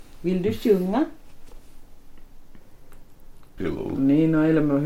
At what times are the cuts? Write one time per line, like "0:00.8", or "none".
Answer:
0:03.6

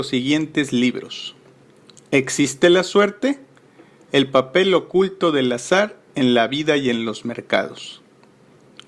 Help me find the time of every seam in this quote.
none

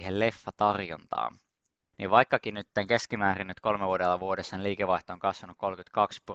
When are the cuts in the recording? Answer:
0:01.9

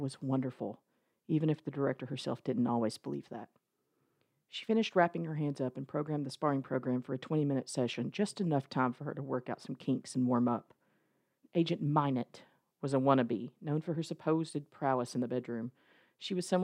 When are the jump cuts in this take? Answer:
0:11.4

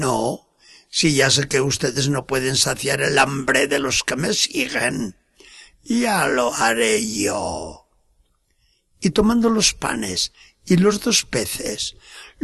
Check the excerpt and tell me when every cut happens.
none

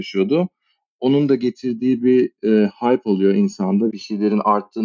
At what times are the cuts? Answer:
0:03.9

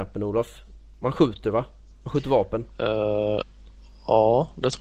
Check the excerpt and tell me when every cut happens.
none

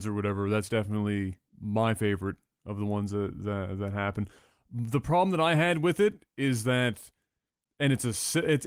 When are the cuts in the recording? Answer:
0:01.5

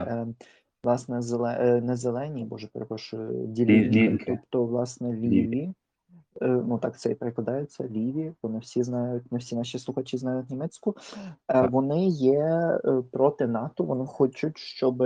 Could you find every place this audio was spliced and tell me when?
none

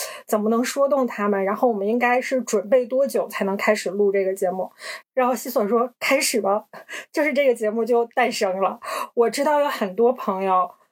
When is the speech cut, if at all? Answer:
0:05.0

